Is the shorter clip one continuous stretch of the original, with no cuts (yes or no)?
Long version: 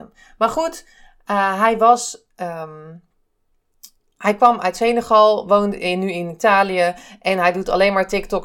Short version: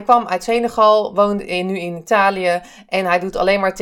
yes